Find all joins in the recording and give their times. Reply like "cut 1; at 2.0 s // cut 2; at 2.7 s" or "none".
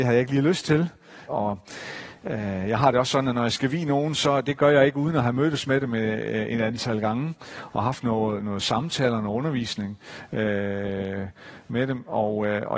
cut 1; at 1.3 s

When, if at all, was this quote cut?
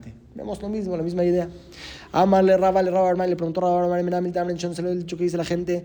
none

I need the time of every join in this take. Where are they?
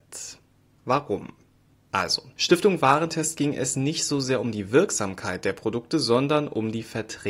none

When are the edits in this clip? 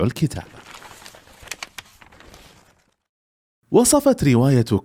none

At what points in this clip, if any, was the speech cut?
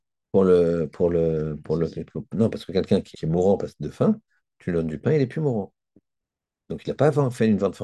cut 1; at 3.1 s

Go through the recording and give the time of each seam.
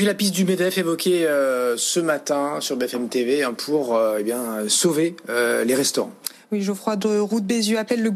none

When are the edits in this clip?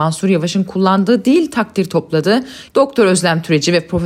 cut 1; at 2.7 s

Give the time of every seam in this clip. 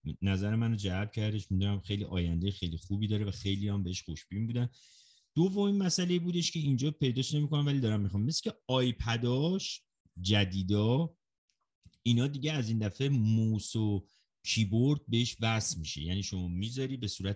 none

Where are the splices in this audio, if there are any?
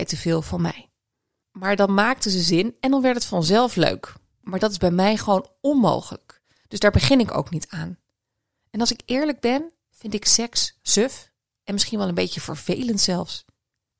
cut 1; at 1.4 s

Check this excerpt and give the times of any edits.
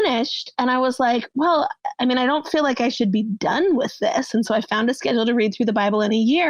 none

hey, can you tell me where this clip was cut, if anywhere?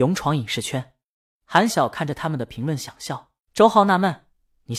cut 1; at 1.7 s // cut 2; at 3.4 s

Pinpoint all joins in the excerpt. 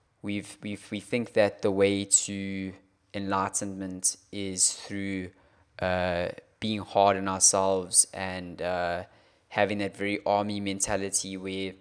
none

